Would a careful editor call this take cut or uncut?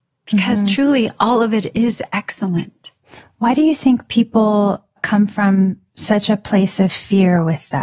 uncut